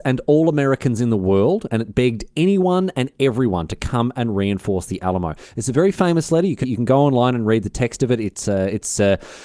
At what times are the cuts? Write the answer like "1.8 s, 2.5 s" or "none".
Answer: 6.6 s